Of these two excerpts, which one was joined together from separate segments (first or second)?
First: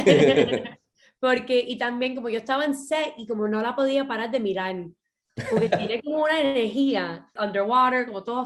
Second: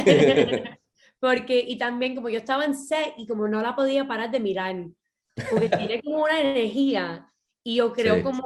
first